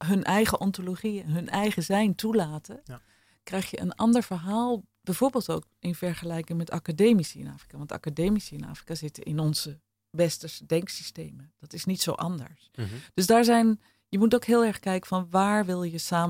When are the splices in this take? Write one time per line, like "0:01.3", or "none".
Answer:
none

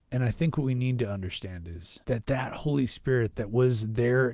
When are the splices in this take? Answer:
0:02.0

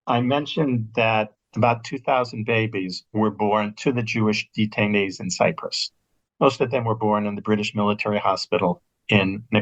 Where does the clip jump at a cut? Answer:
none

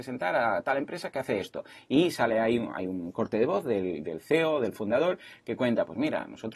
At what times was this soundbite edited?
none

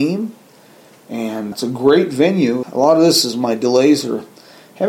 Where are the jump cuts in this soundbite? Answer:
0:01.5
0:02.6

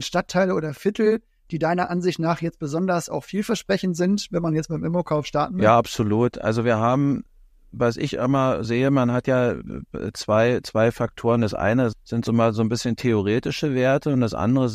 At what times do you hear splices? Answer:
0:08.6
0:11.9

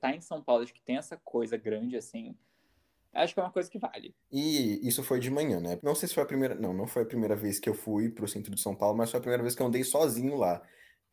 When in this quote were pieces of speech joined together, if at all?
0:04.2
0:05.8

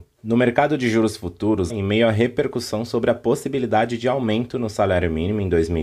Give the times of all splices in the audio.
0:01.7

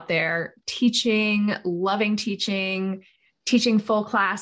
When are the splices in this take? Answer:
none

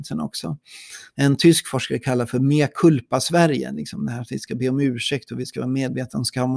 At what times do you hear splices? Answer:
0:01.1

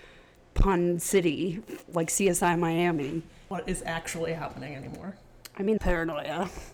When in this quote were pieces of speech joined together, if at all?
0:05.8

